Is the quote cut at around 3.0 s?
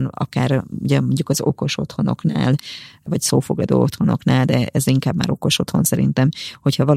no; 0 cuts

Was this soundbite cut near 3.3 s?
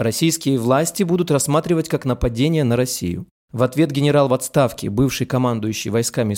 no; 0 cuts

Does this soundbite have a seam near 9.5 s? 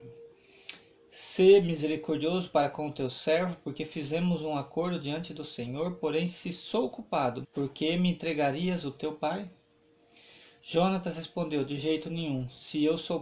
no; 1 cut; at 7.4 s

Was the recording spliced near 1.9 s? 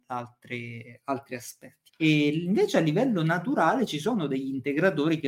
yes; 1 cut; at 1.9 s

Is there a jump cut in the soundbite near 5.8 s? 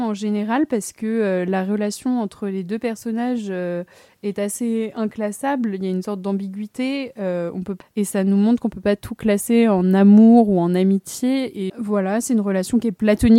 no; 1 cut; at 11.7 s

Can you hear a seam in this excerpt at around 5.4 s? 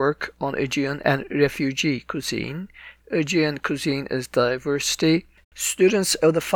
yes; 2 cuts; at 3.0 s, 5.4 s

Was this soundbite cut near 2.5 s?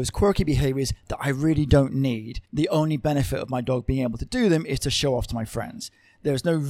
yes; 1 cut; at 2.5 s

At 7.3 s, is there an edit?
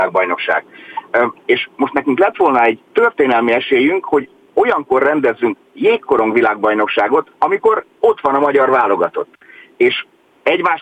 yes; 2 cuts; at 1.4 s, 7.3 s

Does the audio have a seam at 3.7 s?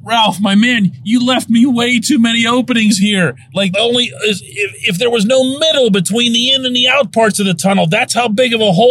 yes; 1 cut; at 3.7 s

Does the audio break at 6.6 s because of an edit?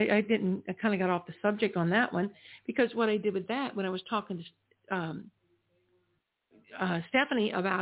no; 0 cuts

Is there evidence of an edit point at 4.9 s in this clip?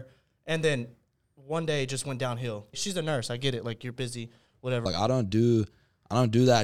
yes; 2 cuts; at 2.7 s, 4.9 s

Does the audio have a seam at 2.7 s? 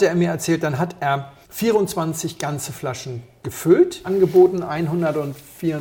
no; 2 cuts; at 1.4 s, 4.0 s

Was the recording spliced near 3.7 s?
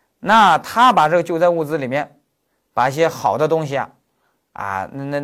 no; 0 cuts

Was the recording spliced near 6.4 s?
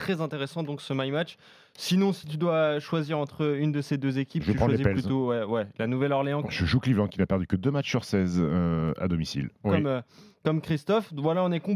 yes; 2 cuts; at 6.4 s, 9.6 s

